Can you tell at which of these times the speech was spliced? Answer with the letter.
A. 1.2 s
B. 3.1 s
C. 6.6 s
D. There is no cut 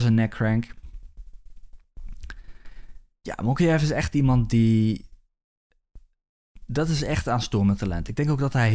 D